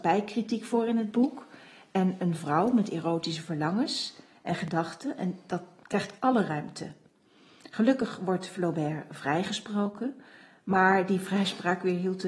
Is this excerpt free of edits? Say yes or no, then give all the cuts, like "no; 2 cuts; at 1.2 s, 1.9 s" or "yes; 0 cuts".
yes; 0 cuts